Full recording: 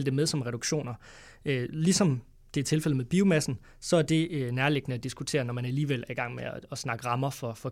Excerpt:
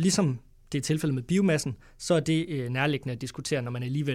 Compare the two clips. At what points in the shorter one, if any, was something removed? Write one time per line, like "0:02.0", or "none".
none